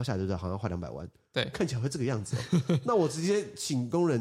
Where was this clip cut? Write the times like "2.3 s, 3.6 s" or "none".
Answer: 1.5 s